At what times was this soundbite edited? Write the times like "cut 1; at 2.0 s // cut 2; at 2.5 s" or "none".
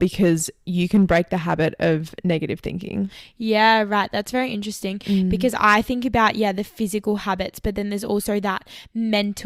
none